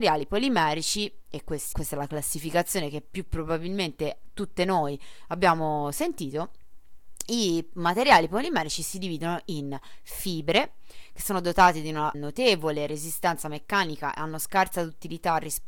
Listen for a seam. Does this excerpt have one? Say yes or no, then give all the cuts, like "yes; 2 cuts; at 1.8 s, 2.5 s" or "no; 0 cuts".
yes; 2 cuts; at 1.7 s, 12.1 s